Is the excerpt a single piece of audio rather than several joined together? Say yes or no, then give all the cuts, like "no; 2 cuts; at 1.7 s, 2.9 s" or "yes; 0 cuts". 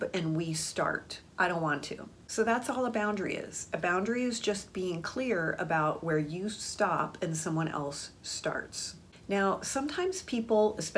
no; 1 cut; at 1.3 s